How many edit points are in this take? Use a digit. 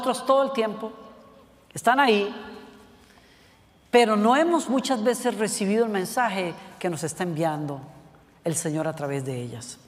0